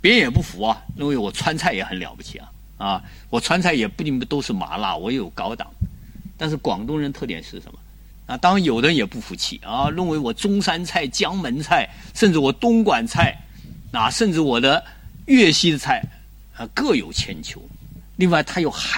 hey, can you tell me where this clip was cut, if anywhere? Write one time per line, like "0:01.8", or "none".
0:08.1
0:18.0